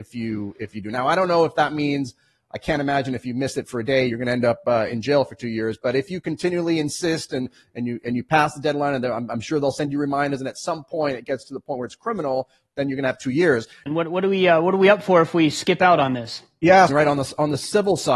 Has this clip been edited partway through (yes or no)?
yes